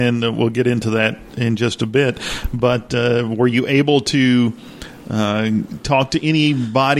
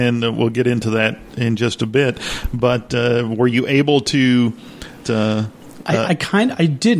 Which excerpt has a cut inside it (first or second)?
second